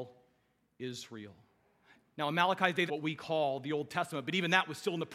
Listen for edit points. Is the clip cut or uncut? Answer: cut